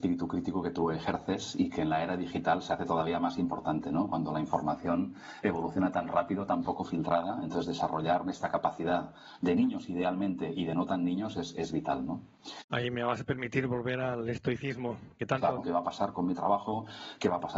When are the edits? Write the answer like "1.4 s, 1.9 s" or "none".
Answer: 12.6 s, 15.6 s

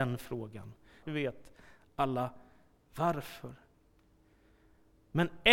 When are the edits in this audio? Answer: 1.0 s

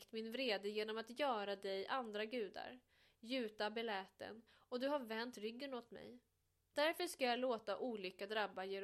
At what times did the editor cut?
none

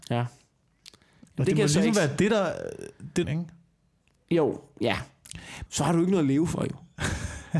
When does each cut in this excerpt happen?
3.2 s, 5.7 s

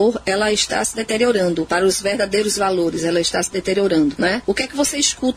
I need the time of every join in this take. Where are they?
none

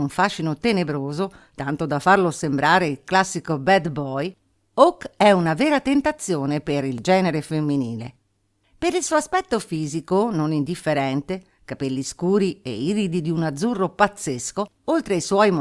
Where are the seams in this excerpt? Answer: 8.6 s

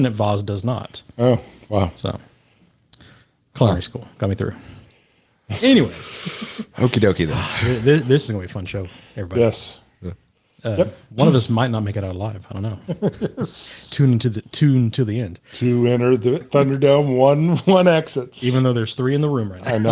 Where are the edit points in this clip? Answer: 16.4 s

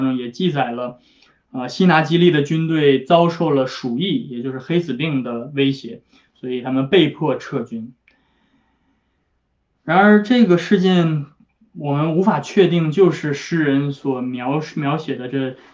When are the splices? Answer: 6.3 s

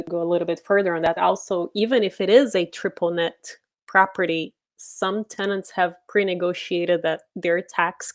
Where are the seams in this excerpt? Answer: none

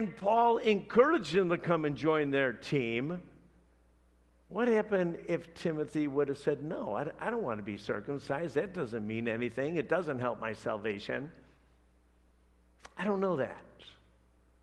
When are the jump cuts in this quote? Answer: none

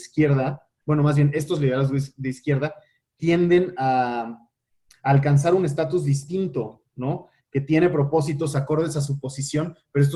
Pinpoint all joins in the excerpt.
none

